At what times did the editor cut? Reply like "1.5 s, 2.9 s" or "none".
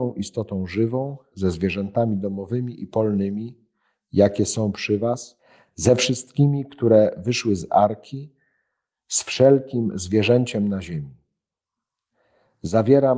1.3 s

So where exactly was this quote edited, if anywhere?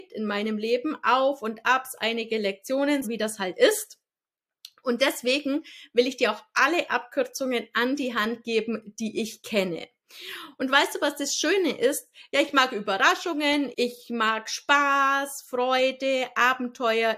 3.0 s, 12.3 s, 13.7 s

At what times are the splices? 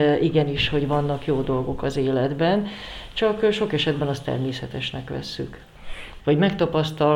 6.2 s

